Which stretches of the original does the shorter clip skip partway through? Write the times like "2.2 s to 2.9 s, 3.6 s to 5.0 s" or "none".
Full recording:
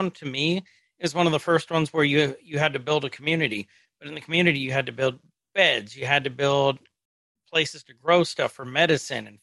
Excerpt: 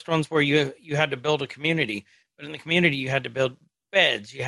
none